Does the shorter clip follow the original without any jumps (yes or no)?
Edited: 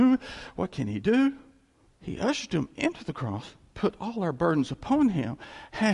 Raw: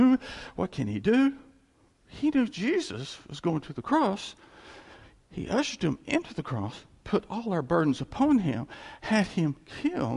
no